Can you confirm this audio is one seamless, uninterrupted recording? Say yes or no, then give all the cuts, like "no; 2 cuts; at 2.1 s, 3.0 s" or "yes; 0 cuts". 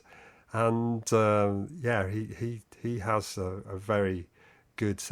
yes; 0 cuts